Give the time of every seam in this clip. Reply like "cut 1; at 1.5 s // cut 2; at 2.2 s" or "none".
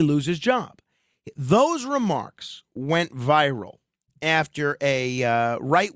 none